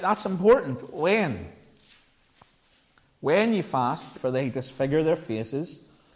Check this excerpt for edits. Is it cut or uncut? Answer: cut